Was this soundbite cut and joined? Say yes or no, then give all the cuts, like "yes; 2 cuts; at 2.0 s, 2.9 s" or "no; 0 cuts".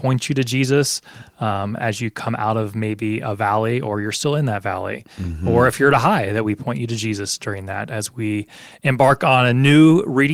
no; 0 cuts